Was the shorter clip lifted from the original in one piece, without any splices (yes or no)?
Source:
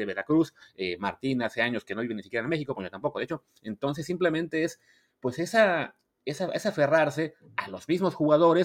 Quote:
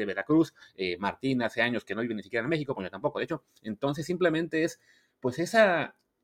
yes